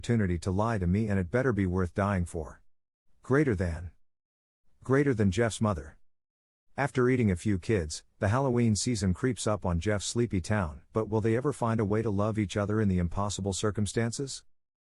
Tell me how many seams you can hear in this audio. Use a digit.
1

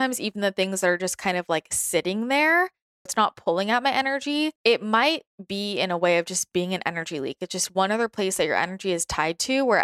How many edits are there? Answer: 2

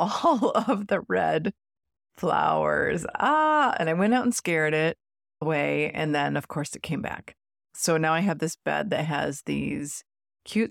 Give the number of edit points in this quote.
0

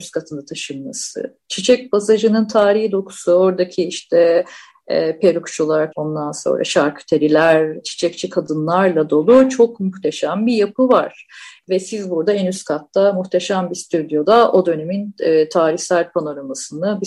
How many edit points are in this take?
2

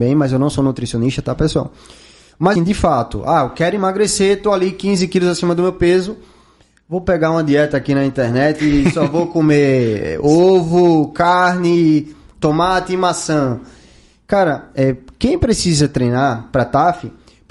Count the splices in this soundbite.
1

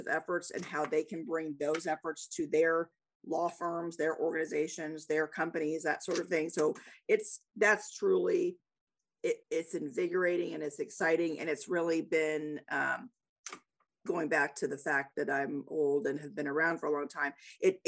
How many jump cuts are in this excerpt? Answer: 1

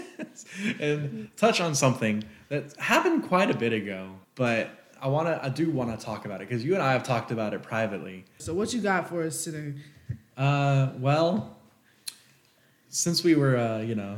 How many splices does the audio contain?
2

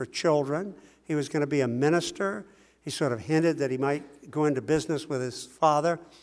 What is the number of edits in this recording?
0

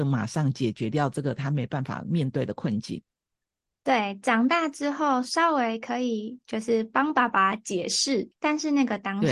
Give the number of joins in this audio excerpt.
2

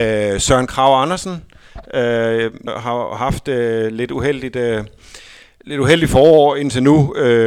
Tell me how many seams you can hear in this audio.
1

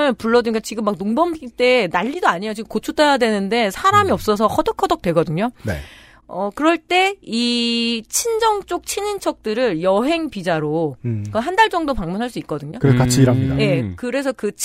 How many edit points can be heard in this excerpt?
0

